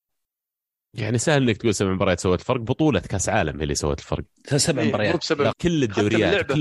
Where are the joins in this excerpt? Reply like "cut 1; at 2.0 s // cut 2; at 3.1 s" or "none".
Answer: cut 1; at 5.5 s